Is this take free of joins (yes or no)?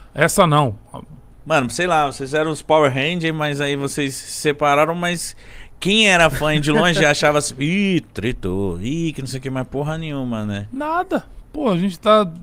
no